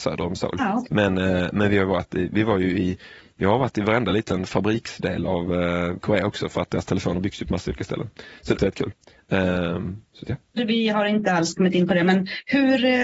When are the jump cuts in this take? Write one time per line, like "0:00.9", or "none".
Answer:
0:08.6
0:10.6